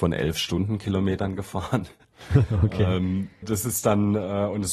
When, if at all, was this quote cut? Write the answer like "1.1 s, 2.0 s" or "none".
3.4 s